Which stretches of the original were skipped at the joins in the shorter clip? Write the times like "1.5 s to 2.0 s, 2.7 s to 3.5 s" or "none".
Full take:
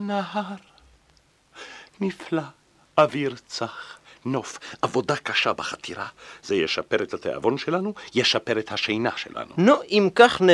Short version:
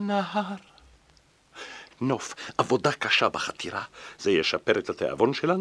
1.9 s to 4.1 s

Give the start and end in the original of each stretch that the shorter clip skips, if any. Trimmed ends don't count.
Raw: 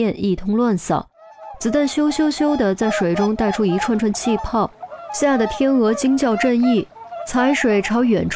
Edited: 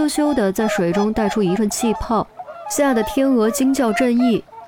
3.8 s to 4.0 s

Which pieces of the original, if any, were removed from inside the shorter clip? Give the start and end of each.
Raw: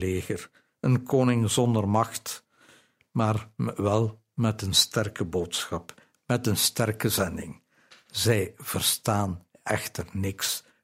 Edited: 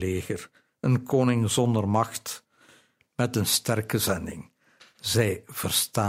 3.1 s to 6.2 s

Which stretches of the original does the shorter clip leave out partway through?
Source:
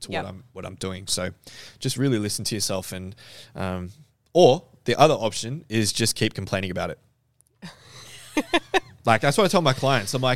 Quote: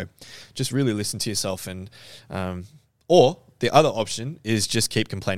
none

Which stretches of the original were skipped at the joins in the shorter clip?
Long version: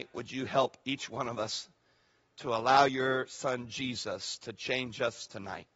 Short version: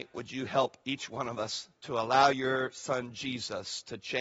1.8 s to 2.3 s

